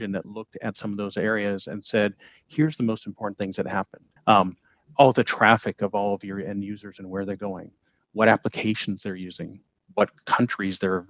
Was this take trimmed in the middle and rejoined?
yes; 1 cut; at 4.2 s

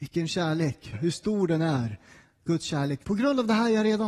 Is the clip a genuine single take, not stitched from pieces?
no; 2 cuts; at 0.9 s, 3.0 s

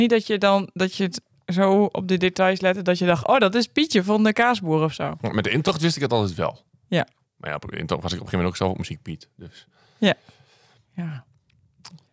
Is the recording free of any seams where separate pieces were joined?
yes; 0 cuts

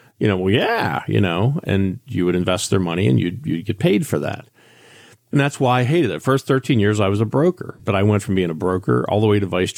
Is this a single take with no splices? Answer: yes; 0 cuts

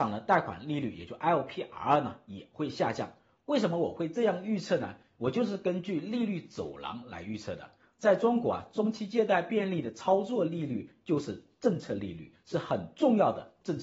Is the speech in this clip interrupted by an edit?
no; 0 cuts

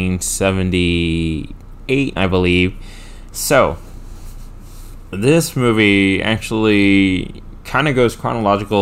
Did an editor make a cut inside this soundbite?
yes; 2 cuts; at 2.2 s, 3.3 s

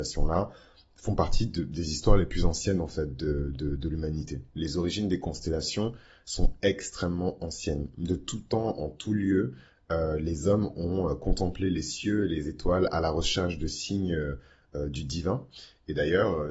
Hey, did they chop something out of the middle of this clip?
no; 0 cuts

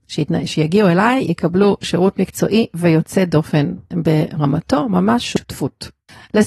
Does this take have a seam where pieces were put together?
no; 0 cuts

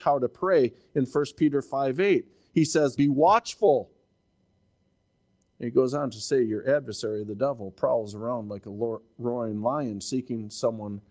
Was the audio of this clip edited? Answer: yes; 1 cut; at 3.0 s

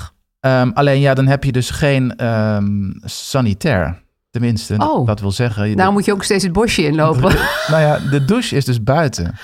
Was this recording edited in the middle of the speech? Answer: no; 0 cuts

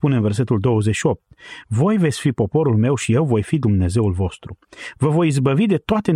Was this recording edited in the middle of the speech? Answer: yes; 1 cut; at 1.6 s

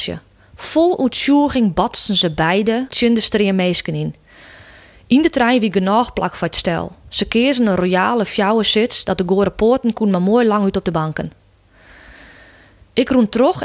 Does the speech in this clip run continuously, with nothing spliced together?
no; 1 cut; at 2.9 s

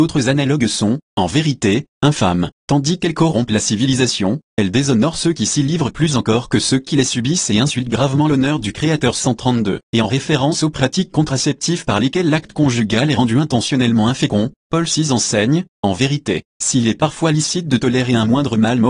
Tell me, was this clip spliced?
yes; 1 cut; at 9.8 s

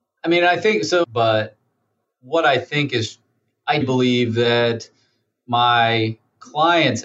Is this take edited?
yes; 2 cuts; at 1.0 s, 3.8 s

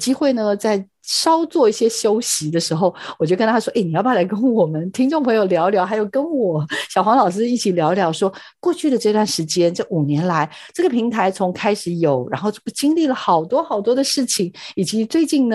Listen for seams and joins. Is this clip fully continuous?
yes; 0 cuts

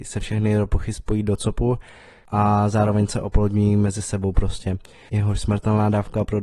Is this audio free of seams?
no; 1 cut; at 5.1 s

